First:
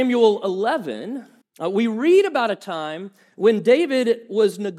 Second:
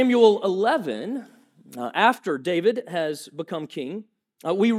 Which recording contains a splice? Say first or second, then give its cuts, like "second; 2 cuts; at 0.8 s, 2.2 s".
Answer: first; 1 cut; at 1.4 s